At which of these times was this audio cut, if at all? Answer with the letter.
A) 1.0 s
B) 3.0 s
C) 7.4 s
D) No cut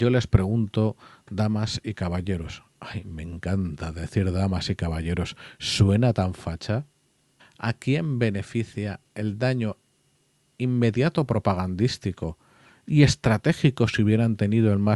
C